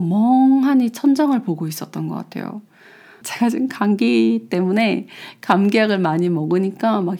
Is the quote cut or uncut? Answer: cut